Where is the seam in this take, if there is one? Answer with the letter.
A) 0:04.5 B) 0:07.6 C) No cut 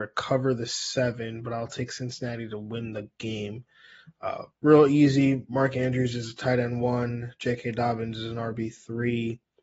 A